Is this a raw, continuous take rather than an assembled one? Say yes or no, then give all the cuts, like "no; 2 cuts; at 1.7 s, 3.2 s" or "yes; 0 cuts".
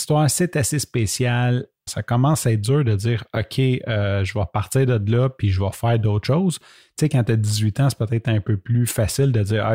no; 1 cut; at 1.9 s